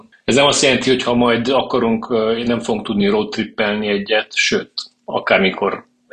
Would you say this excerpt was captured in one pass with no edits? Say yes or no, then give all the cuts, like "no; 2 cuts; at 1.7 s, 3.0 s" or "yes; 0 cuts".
yes; 0 cuts